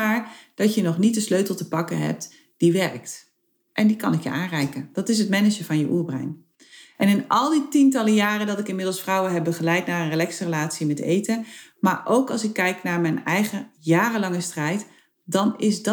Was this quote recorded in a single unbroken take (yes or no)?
yes